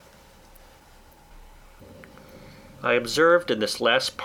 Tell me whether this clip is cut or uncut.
uncut